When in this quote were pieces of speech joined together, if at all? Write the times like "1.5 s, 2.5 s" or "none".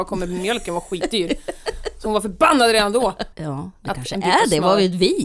3.3 s